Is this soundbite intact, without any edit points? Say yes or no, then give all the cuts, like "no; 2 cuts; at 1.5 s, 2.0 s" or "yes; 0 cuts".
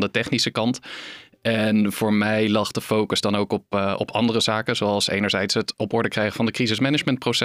yes; 0 cuts